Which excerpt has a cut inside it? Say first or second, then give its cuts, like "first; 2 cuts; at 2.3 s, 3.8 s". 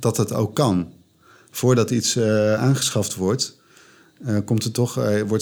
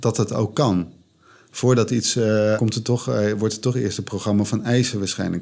second; 1 cut; at 2.6 s